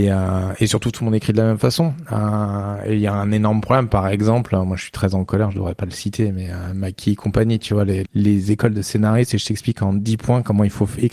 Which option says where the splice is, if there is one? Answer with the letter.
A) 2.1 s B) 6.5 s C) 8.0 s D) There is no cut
C